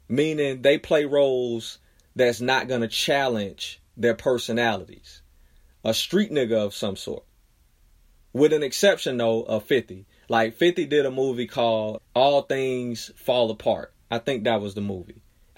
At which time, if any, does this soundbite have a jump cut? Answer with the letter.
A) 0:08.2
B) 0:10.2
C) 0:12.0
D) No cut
C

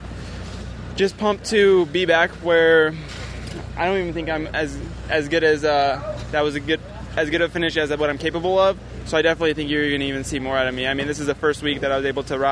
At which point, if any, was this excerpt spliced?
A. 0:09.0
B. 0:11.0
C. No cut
C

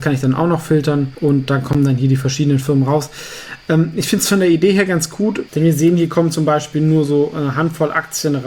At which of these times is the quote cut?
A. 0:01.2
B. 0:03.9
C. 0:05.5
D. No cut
C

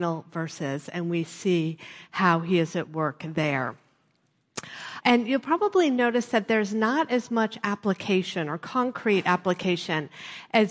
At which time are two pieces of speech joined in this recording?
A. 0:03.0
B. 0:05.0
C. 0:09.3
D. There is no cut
B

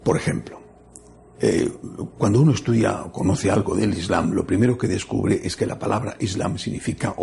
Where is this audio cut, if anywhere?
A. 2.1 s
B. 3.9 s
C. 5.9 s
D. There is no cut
D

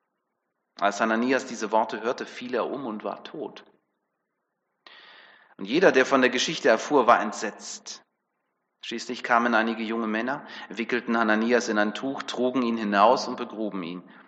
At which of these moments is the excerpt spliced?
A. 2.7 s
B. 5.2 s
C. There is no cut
C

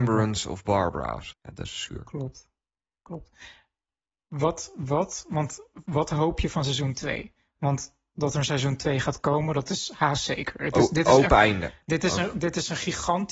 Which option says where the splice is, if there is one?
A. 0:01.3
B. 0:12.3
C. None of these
A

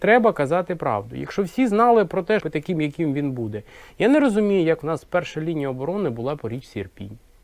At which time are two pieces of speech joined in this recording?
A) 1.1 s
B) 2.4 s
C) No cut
B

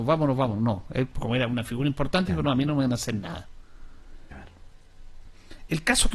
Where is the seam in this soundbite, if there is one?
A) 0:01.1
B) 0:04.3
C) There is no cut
B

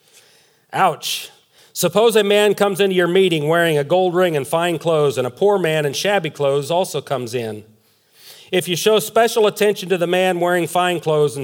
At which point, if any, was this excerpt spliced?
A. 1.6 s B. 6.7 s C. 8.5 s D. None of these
A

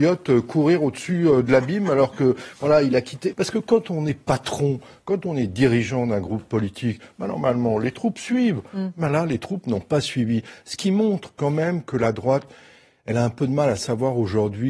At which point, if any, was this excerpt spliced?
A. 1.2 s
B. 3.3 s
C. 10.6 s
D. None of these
B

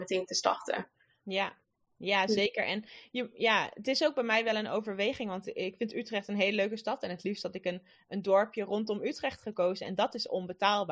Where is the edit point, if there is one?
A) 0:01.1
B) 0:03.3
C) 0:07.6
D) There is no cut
D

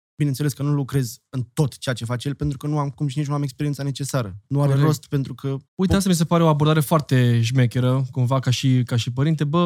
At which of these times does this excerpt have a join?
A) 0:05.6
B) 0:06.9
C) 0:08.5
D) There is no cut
A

